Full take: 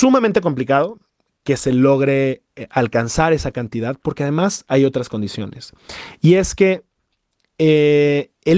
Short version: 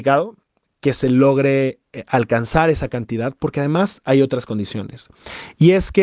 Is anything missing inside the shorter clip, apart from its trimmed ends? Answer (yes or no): no